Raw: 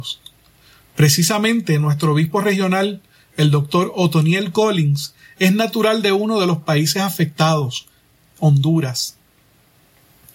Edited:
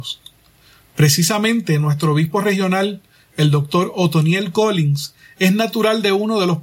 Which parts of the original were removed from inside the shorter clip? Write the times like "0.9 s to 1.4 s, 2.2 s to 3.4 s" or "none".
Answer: none